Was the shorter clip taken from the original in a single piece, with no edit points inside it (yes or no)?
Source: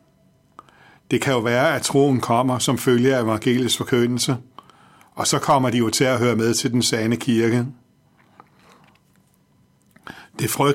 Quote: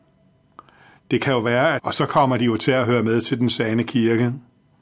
no